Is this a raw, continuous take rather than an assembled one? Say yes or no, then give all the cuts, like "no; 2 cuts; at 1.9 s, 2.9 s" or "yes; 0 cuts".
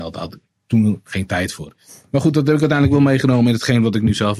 yes; 0 cuts